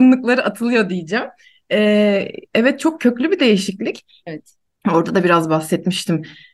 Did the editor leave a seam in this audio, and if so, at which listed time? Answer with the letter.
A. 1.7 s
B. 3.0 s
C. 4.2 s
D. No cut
C